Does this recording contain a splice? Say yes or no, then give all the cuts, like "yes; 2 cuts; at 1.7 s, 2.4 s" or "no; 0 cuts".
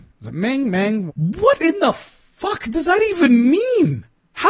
yes; 1 cut; at 1.1 s